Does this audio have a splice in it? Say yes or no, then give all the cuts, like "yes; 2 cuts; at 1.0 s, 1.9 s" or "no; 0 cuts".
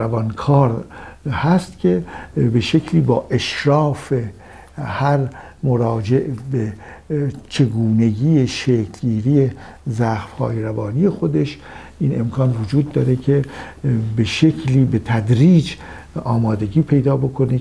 no; 0 cuts